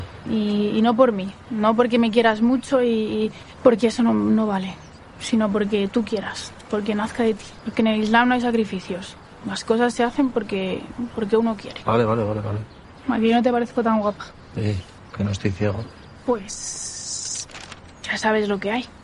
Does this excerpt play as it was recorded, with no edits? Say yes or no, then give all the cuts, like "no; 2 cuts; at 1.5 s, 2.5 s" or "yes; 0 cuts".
yes; 0 cuts